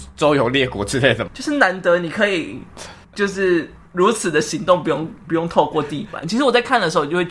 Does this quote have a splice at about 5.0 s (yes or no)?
no